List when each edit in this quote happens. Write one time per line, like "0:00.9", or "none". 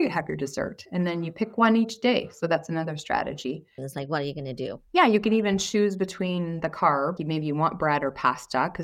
0:03.8
0:04.9
0:07.2

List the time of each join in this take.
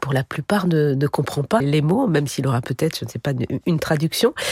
0:01.6

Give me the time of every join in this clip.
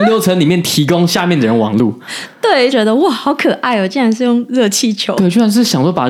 0:02.7

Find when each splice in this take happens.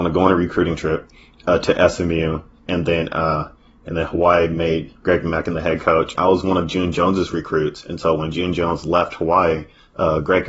0:06.1

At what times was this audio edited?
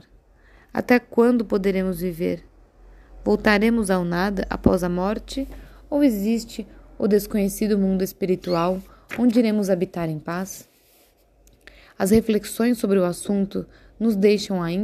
none

